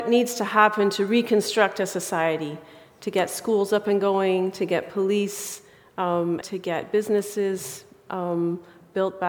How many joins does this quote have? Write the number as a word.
one